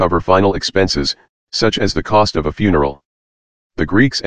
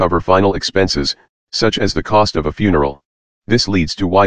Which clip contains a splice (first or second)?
second